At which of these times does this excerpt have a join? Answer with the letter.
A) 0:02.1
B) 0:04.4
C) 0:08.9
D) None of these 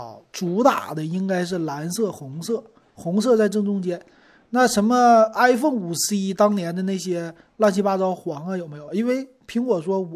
C